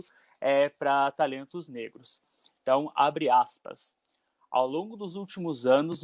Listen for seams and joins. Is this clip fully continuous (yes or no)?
yes